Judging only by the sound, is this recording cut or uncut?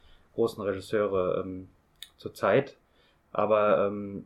uncut